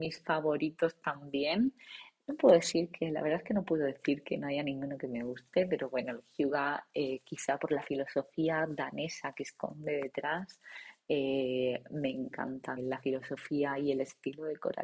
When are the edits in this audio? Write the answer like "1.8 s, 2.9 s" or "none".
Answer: 12.8 s